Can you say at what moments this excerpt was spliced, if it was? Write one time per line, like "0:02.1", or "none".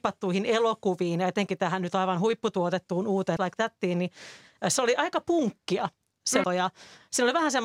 0:03.4
0:06.4